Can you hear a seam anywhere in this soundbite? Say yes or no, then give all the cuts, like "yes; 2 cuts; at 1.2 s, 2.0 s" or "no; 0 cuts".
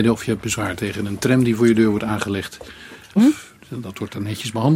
yes; 1 cut; at 3.2 s